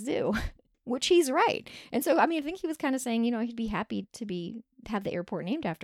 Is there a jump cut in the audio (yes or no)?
yes